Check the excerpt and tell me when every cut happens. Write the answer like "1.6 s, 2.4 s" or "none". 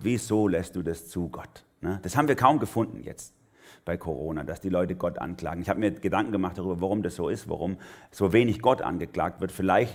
none